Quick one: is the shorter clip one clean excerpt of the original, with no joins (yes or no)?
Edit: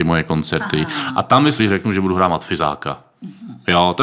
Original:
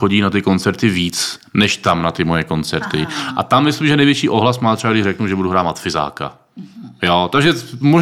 no